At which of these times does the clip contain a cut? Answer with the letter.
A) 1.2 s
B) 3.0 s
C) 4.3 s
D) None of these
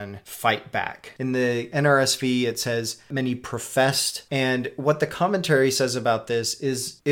A